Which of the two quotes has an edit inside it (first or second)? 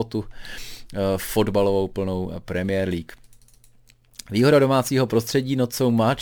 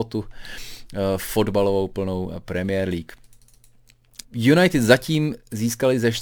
second